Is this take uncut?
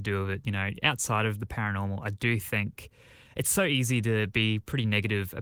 yes; 0 cuts

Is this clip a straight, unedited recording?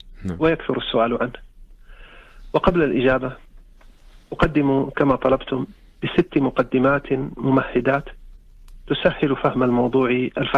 yes; 0 cuts

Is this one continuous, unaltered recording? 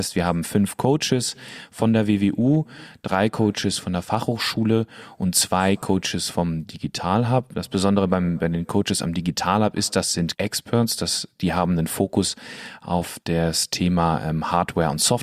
yes; 0 cuts

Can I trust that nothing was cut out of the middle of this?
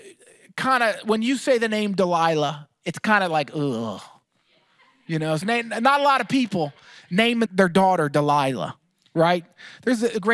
no; 2 cuts; at 5.4 s, 7.5 s

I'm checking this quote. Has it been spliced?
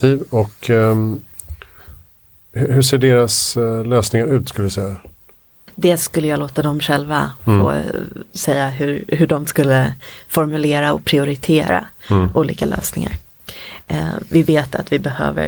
no; 0 cuts

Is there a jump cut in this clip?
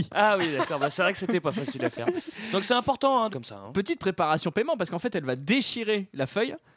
yes; 1 cut; at 3.3 s

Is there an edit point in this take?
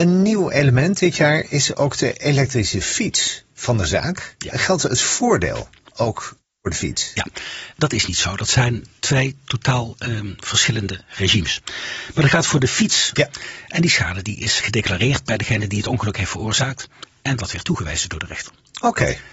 yes; 3 cuts; at 7.7 s, 13.2 s, 14.6 s

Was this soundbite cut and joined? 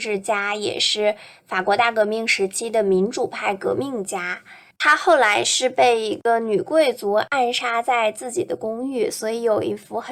no; 0 cuts

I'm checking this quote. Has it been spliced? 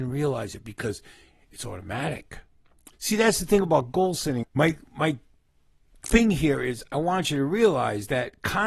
yes; 2 cuts; at 2.9 s, 4.4 s

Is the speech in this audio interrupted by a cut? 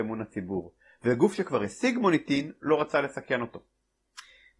no; 0 cuts

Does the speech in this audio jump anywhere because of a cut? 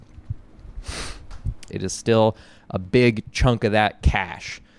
yes; 1 cut; at 1.7 s

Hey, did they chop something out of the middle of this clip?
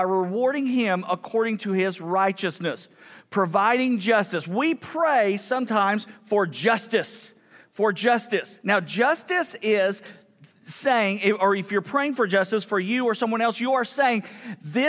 no; 0 cuts

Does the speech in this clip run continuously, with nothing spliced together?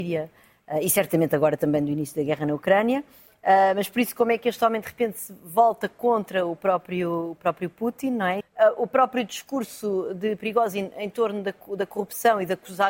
no; 1 cut; at 8.4 s

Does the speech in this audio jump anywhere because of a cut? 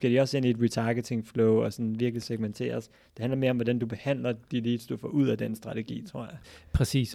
no; 0 cuts

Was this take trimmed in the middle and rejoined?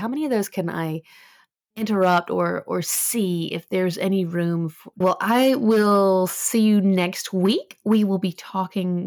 yes; 1 cut; at 5.0 s

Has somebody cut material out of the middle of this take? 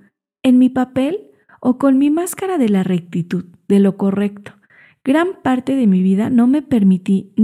no; 0 cuts

